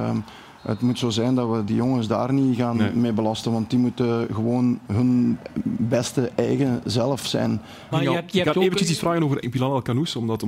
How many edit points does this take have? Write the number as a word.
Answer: one